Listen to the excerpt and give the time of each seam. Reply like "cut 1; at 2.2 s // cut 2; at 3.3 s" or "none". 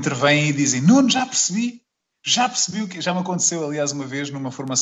none